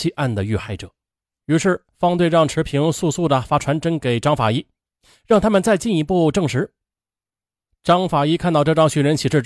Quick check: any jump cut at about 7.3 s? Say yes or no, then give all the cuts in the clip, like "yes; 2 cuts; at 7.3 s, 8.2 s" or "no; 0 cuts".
no; 0 cuts